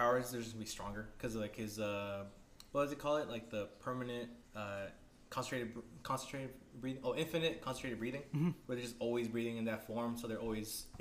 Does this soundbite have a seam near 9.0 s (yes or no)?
no